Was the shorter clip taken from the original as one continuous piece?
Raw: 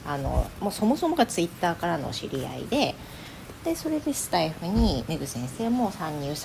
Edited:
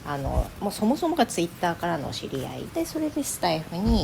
no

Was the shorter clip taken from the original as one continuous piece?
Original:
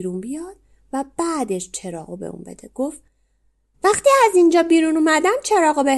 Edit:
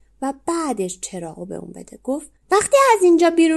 no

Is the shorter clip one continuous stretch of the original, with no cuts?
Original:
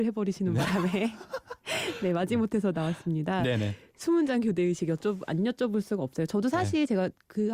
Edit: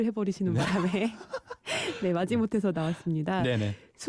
yes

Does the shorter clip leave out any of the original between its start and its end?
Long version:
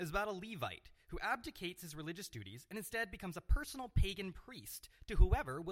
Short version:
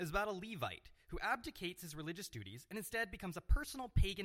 no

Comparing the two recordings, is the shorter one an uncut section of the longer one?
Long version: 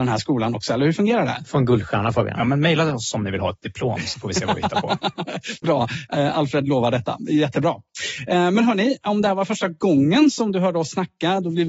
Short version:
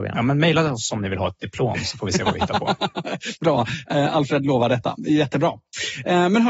yes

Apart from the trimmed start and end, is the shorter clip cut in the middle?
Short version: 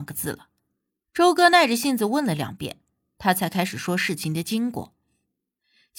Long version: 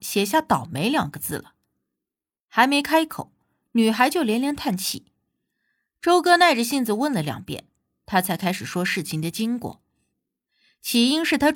yes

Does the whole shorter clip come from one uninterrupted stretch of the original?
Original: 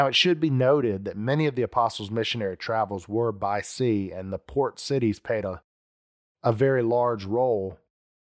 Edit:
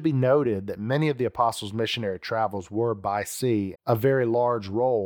no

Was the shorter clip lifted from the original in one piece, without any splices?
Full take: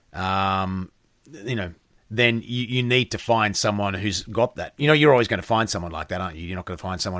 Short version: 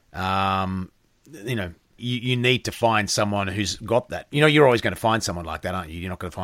no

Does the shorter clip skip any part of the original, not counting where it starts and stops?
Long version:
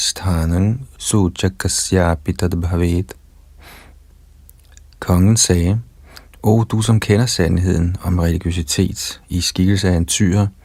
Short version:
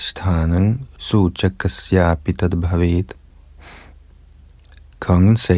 no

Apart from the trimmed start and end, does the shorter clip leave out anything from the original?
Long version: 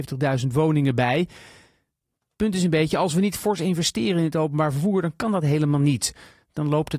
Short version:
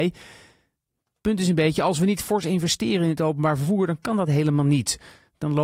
no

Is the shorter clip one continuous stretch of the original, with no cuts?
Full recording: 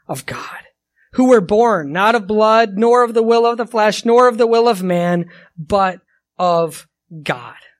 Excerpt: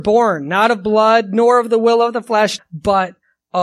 no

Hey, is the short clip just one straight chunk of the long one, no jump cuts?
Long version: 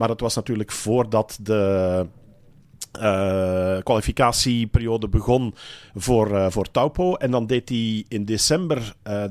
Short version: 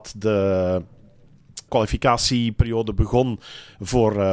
no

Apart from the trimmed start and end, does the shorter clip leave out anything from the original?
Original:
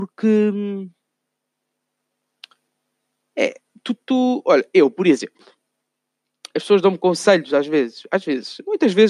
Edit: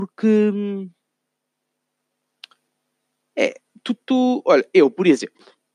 no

